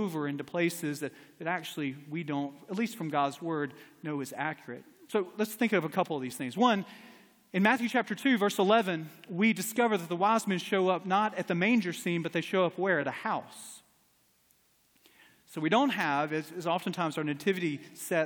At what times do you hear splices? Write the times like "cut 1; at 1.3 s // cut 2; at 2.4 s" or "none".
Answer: none